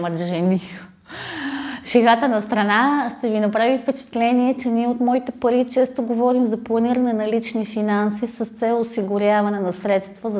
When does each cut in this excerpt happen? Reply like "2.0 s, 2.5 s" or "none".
none